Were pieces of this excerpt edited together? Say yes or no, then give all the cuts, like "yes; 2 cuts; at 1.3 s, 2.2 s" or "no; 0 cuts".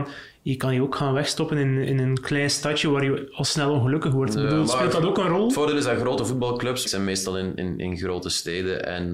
yes; 1 cut; at 6.8 s